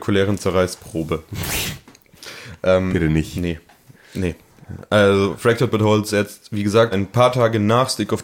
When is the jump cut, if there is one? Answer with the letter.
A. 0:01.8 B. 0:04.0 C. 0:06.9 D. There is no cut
C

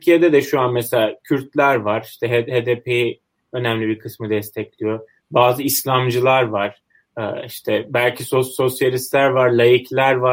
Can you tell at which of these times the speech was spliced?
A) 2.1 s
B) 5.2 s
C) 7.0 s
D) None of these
D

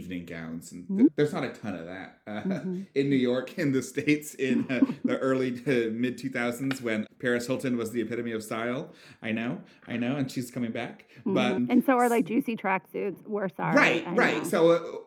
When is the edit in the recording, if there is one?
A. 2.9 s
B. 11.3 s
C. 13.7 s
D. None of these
D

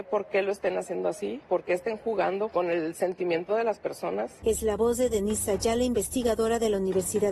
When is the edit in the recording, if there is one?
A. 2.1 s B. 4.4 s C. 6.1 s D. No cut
B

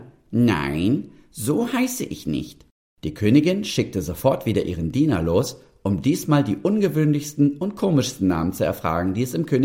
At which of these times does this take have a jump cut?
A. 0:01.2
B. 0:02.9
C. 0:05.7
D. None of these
B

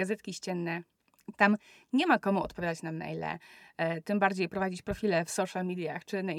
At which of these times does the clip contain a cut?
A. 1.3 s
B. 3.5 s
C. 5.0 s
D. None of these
A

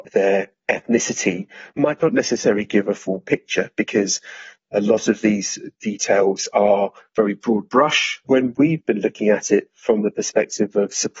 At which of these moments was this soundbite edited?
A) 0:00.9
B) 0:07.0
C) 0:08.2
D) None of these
C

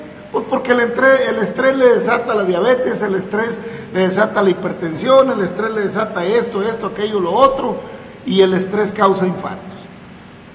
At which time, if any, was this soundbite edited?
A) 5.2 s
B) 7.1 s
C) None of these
C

